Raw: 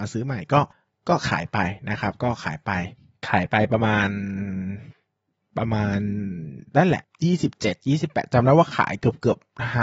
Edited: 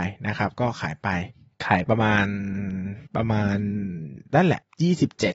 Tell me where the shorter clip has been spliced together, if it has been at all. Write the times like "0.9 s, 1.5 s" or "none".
1.9 s, 3.1 s